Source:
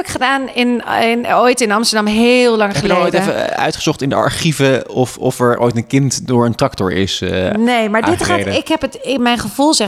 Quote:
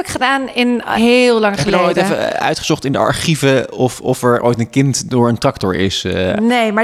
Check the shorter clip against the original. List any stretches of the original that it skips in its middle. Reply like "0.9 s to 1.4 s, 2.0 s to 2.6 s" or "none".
0.9 s to 2.1 s